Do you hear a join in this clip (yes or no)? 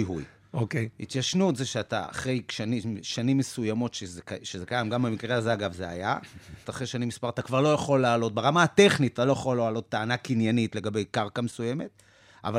yes